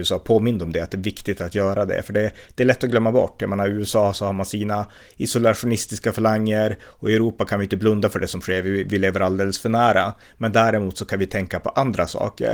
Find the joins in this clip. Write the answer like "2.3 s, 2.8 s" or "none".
none